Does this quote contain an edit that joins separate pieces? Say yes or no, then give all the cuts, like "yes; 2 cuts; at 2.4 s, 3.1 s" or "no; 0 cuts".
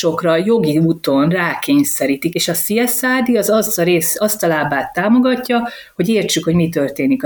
yes; 1 cut; at 2.3 s